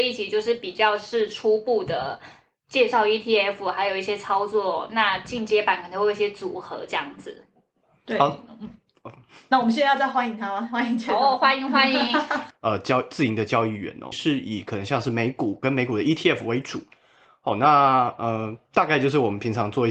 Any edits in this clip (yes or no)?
yes